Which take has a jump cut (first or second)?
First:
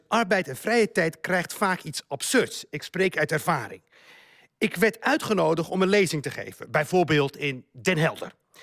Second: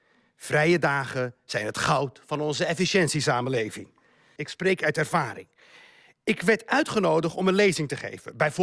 second